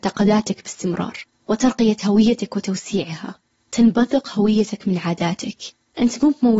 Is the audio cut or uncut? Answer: uncut